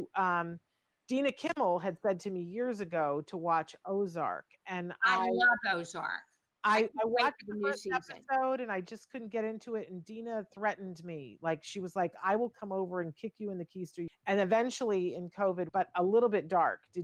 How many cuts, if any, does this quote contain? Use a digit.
2